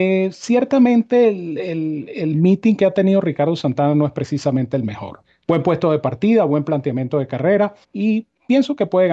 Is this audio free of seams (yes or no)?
no